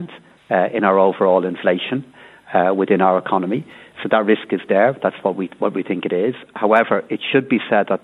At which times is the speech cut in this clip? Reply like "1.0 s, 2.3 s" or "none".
none